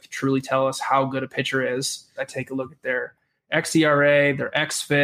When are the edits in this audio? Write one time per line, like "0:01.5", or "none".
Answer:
0:02.2